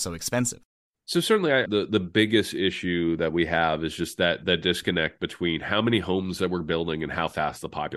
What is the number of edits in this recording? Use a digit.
1